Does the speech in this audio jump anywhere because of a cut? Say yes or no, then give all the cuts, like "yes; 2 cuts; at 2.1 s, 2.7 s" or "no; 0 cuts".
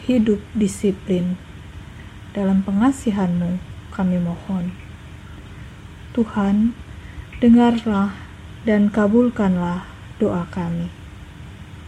no; 0 cuts